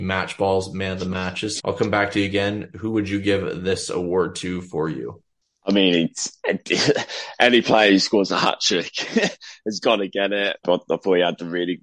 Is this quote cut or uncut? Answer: cut